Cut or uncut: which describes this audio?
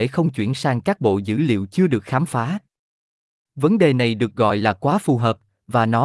uncut